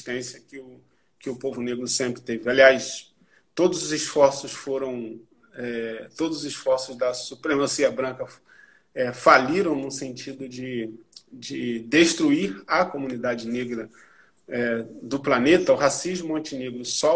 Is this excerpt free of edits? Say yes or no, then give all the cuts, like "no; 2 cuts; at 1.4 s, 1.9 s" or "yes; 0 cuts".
yes; 0 cuts